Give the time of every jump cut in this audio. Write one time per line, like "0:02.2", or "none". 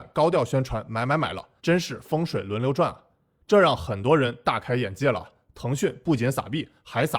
0:01.6
0:03.4